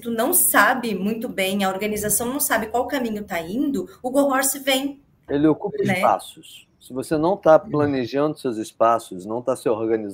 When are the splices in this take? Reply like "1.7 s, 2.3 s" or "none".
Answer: 5.3 s